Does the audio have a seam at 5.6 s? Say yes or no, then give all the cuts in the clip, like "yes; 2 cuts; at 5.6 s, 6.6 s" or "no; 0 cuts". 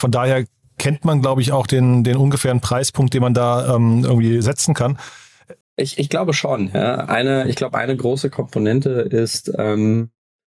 yes; 1 cut; at 5.6 s